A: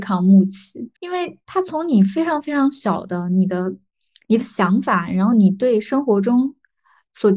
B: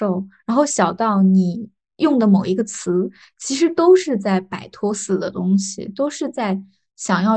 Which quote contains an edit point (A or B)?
A